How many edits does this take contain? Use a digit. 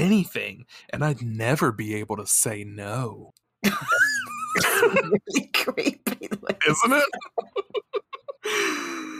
0